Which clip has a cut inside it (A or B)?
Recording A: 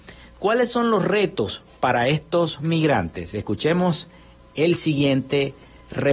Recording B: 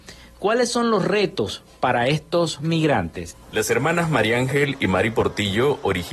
B